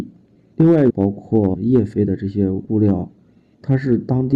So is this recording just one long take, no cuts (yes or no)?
no